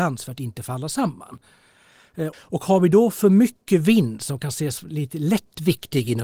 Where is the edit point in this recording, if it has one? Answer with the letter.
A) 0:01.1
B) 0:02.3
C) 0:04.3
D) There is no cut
B